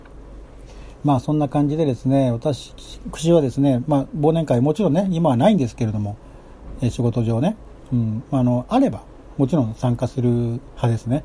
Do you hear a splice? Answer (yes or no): no